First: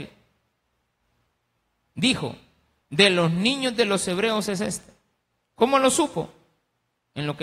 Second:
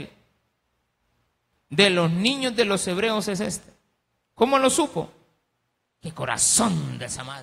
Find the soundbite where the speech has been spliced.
second; 2 cuts; at 1.5 s, 5.8 s

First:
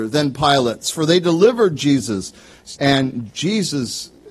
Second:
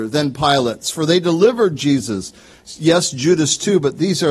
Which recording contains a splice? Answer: first; 1 cut; at 2.8 s

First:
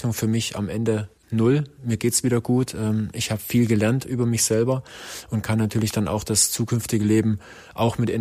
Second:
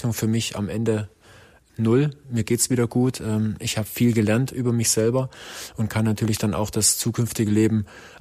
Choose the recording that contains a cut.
first; 1 cut; at 1.2 s

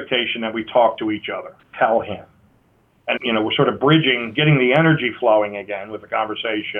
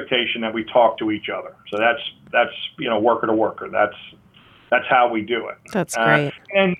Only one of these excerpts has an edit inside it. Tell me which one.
first; 2 cuts; at 1.6 s, 3.2 s

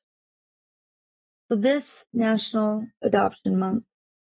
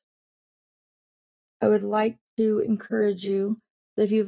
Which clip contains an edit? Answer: second; 1 cut; at 1.5 s

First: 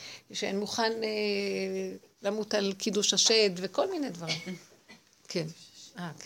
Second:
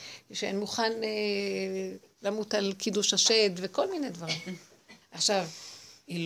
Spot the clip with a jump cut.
second; 1 cut; at 5.0 s

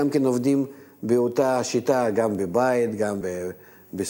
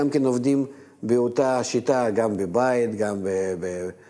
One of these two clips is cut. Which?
first; 1 cut; at 3.2 s

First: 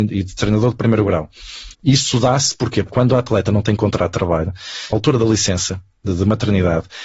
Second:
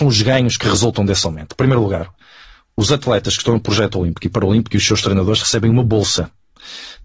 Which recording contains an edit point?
first; 2 cuts; at 1.7 s, 4.9 s

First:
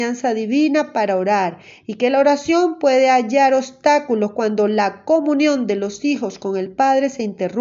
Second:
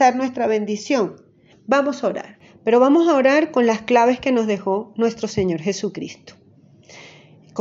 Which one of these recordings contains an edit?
second; 1 cut; at 1.5 s

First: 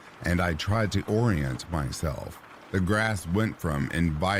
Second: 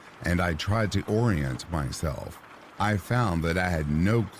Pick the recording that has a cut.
first; 1 cut; at 2.7 s

